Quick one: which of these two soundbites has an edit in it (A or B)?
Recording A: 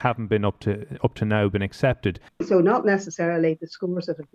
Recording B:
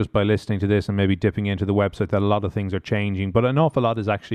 A